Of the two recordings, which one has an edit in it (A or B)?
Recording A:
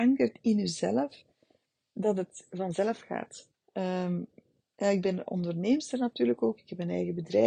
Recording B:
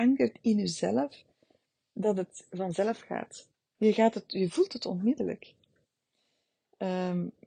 A